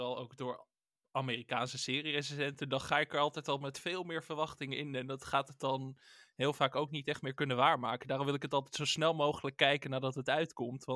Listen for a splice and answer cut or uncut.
uncut